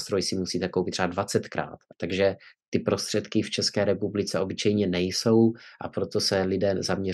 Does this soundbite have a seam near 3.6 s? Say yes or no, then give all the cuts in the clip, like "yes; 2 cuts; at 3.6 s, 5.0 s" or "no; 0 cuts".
no; 1 cut; at 1.9 s